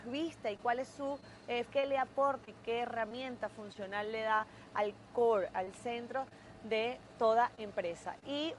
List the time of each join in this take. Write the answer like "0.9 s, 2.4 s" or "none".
1.7 s

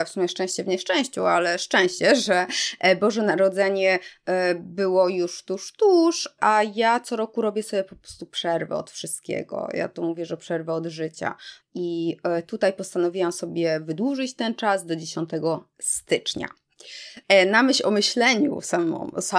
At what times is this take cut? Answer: 11.6 s, 17.2 s

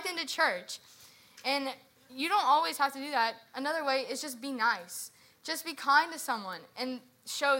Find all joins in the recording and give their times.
none

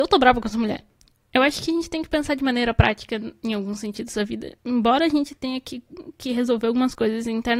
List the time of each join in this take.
none

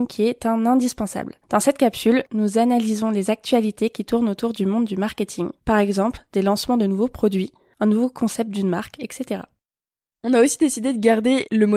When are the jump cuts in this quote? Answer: none

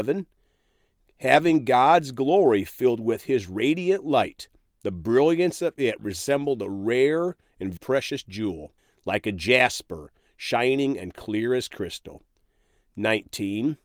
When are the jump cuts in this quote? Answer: 7.8 s

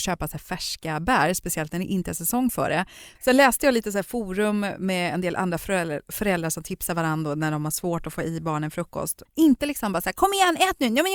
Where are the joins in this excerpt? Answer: 3.1 s, 9.3 s

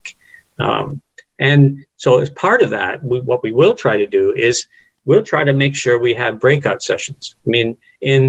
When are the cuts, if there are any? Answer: none

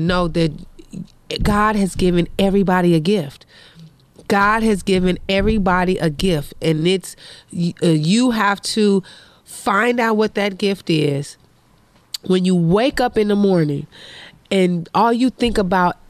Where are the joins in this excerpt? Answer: none

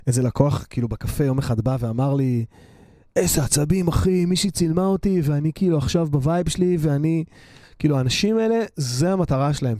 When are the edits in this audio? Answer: 7.6 s

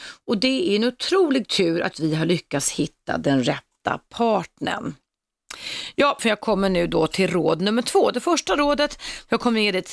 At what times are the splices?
1.9 s, 6.2 s

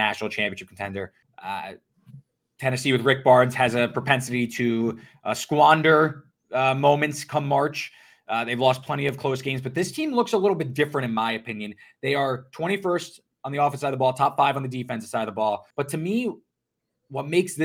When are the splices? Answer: 1.2 s, 15.7 s

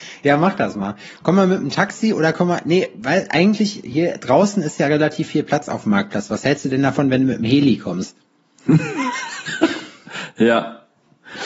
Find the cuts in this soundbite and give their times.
none

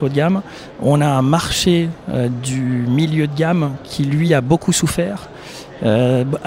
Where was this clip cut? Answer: none

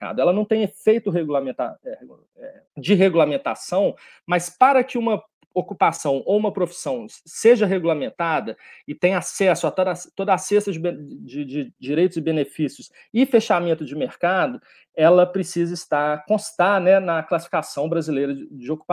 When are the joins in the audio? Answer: 2.7 s

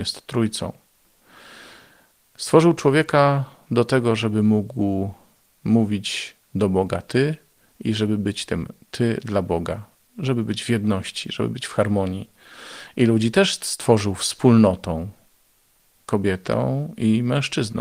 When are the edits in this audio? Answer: none

